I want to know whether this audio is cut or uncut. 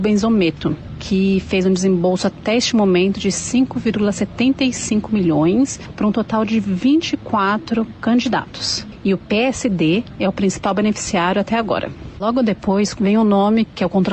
cut